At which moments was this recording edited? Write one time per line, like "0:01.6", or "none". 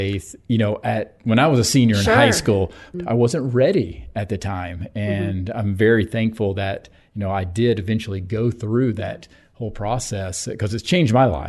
0:02.9